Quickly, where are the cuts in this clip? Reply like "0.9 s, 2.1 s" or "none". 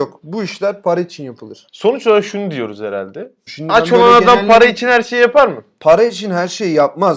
3.5 s